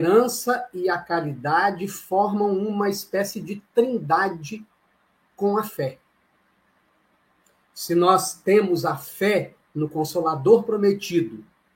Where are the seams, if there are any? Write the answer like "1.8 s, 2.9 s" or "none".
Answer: none